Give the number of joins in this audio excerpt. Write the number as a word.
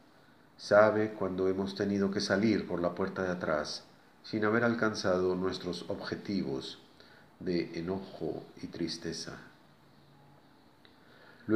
one